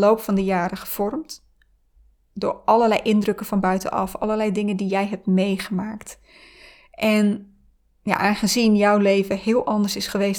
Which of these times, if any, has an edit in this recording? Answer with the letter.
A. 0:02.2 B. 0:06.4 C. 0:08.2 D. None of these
D